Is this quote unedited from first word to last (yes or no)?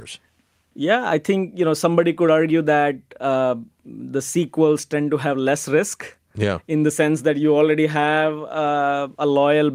yes